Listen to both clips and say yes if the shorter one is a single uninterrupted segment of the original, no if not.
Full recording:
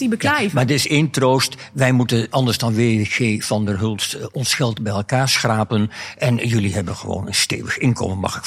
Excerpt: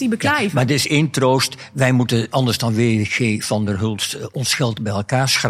yes